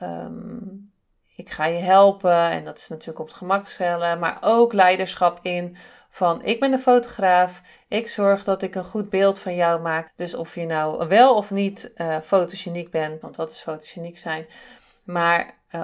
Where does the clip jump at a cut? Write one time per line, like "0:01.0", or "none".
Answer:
0:10.1
0:13.2